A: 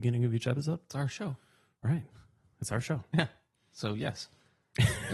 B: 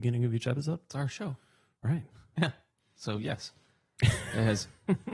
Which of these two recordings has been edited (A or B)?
B